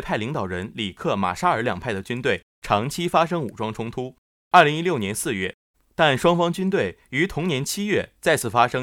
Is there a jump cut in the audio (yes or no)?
yes